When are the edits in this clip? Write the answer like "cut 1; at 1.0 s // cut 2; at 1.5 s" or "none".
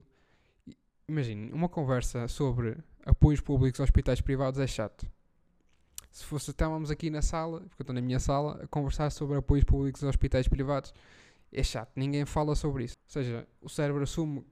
cut 1; at 12.9 s